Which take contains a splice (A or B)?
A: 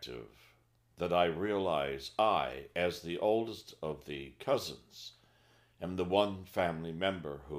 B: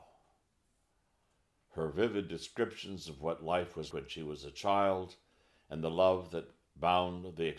B